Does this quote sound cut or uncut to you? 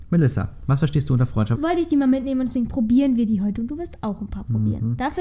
cut